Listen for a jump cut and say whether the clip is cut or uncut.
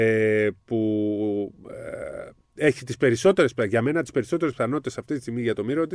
uncut